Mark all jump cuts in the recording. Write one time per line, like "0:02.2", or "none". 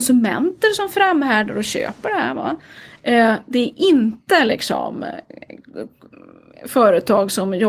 none